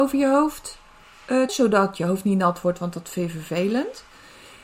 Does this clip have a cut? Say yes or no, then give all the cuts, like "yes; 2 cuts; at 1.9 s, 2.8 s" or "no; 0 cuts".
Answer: yes; 1 cut; at 1.5 s